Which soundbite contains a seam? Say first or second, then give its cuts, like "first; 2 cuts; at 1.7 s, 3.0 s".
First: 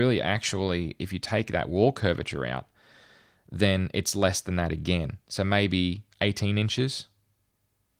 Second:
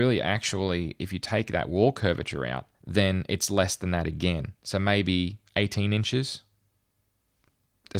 second; 1 cut; at 2.7 s